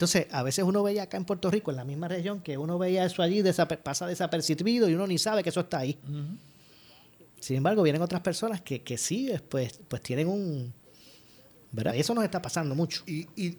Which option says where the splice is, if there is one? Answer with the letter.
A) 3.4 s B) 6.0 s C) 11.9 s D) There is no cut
C